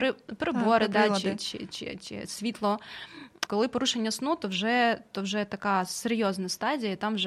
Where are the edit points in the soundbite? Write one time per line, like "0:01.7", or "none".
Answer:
0:03.5